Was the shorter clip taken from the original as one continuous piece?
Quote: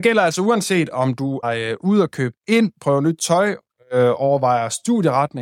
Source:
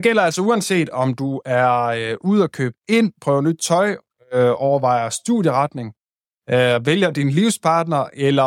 no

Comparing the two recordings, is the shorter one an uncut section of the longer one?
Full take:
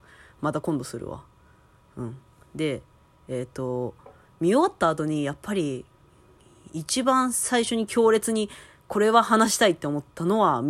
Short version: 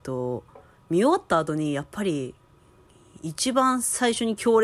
yes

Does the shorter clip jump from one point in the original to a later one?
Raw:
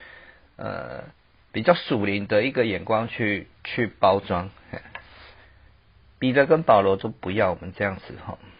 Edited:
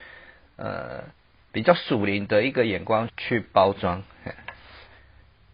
yes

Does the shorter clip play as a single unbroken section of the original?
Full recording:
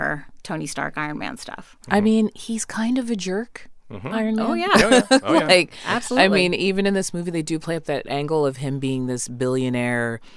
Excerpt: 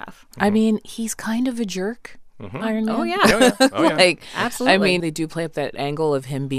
no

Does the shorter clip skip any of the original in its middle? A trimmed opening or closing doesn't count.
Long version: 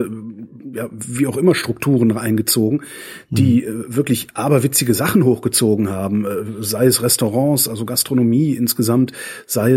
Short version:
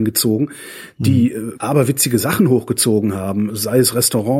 yes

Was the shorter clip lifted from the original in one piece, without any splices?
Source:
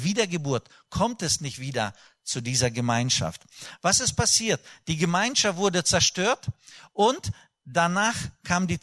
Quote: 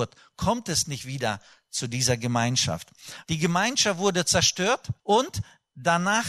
no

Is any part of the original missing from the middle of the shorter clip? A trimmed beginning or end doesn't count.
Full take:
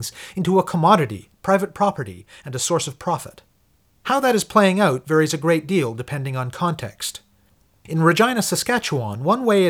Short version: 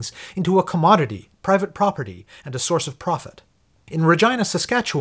yes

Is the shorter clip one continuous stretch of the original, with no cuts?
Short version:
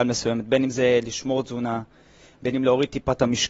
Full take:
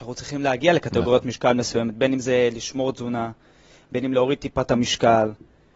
yes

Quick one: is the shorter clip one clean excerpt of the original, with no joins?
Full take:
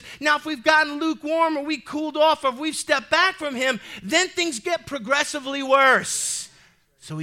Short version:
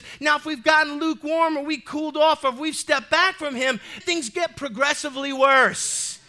no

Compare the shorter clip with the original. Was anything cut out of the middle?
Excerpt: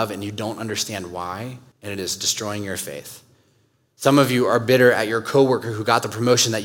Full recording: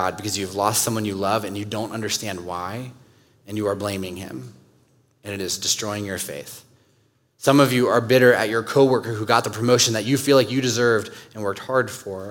yes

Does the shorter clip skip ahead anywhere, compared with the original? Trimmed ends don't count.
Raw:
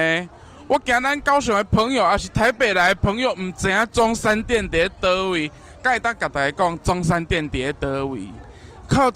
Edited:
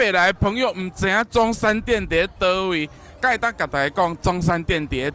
no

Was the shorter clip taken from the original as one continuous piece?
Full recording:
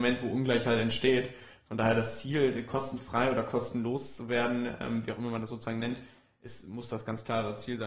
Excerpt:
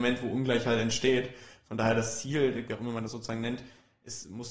no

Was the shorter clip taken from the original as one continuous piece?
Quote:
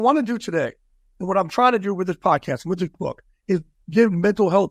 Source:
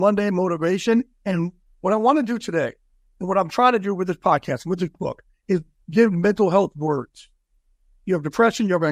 yes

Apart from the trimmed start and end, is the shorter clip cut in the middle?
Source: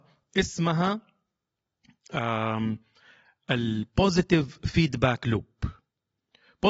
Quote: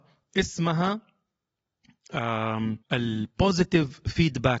yes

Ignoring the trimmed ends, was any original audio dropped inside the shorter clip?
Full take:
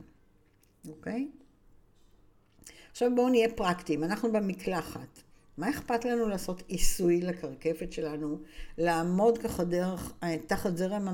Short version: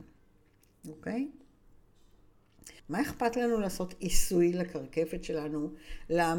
yes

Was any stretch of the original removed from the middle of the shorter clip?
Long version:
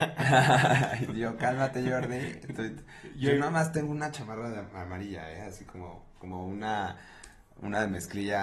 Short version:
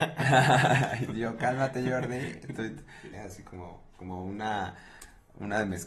yes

